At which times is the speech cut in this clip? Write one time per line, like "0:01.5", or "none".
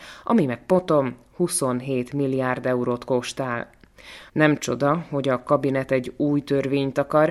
0:04.3

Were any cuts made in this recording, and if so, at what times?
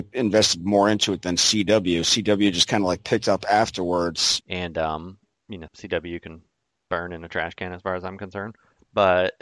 0:04.4
0:05.7

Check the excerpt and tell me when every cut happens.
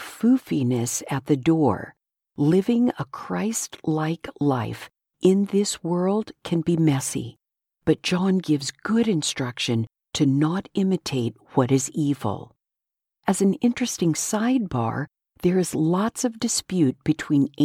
none

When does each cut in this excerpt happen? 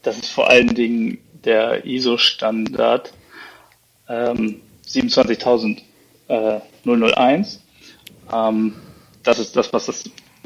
none

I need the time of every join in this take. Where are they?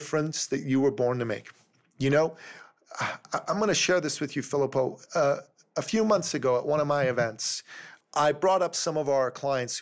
none

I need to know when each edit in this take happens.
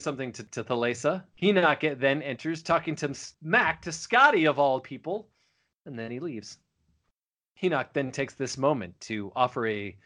0:01.3

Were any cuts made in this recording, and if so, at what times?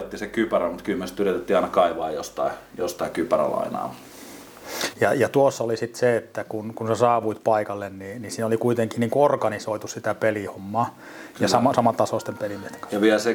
0:04.9
0:11.3

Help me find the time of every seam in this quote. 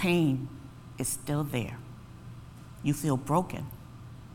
none

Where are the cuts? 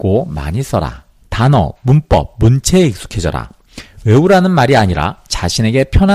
0:01.2

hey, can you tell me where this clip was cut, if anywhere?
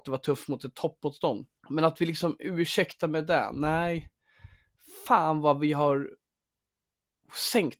0:01.6

